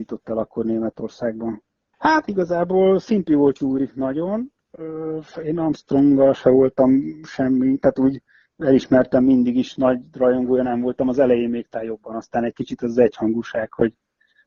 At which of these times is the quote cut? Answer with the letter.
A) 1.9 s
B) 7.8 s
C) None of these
A